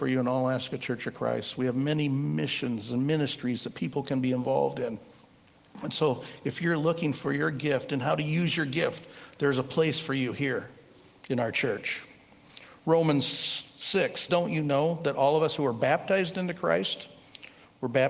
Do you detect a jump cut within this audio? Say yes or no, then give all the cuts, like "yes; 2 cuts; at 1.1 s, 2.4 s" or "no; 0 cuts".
yes; 1 cut; at 14.3 s